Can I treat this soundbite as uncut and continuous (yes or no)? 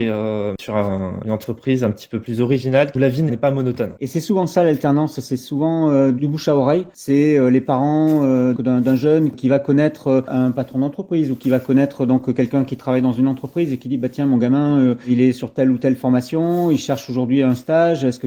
no